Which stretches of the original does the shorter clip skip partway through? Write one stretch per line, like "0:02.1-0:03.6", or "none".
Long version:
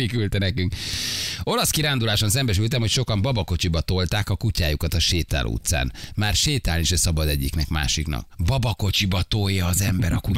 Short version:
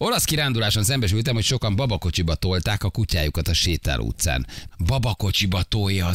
0:06.2-0:08.3